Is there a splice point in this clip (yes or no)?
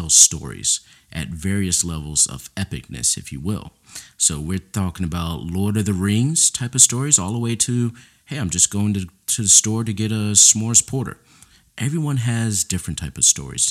no